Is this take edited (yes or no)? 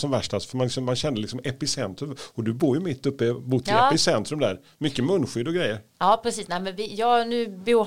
no